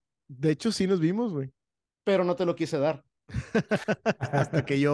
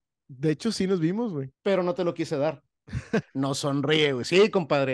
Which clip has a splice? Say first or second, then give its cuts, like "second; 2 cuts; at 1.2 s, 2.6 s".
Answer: second; 2 cuts; at 1.5 s, 3.2 s